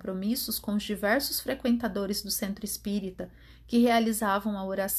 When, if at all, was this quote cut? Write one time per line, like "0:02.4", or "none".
none